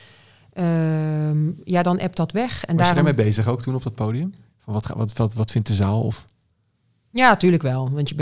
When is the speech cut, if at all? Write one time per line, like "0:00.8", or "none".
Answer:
none